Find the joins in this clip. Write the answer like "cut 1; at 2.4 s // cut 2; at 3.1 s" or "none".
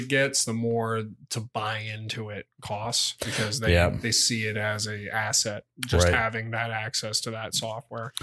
none